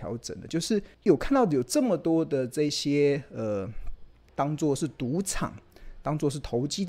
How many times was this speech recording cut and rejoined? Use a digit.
2